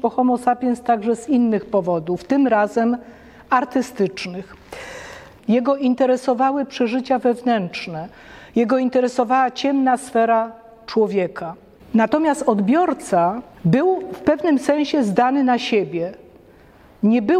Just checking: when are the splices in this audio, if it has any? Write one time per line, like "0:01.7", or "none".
0:05.4